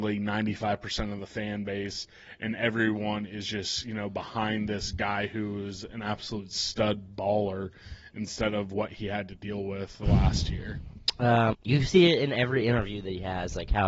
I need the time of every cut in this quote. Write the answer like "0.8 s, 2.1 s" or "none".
11.5 s